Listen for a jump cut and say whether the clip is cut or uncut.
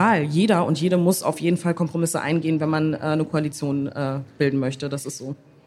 uncut